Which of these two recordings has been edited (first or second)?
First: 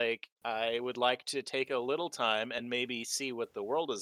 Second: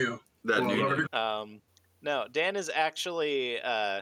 second